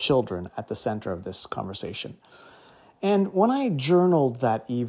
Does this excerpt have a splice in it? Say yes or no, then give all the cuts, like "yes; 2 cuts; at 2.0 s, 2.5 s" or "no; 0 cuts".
no; 0 cuts